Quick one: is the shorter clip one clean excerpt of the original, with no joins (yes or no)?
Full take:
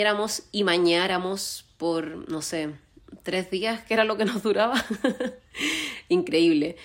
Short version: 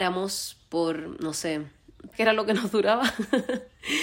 no